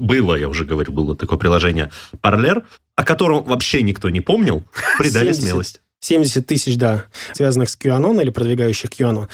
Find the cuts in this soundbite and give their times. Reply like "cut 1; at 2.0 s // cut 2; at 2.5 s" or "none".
cut 1; at 5.0 s // cut 2; at 7.3 s